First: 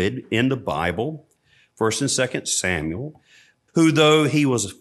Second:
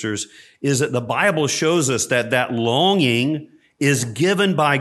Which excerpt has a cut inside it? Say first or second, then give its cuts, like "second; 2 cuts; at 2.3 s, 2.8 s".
first; 1 cut; at 3.7 s